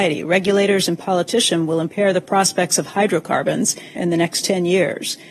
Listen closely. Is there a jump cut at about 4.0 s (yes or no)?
yes